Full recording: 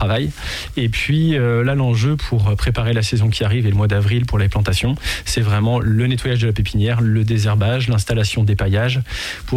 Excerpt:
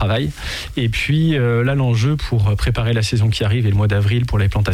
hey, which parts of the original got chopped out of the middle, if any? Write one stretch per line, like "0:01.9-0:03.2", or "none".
none